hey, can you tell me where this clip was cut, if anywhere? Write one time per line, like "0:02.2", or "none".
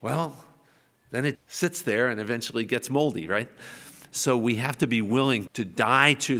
0:01.4
0:05.5